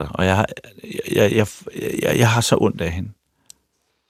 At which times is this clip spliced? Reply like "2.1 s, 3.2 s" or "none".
1.3 s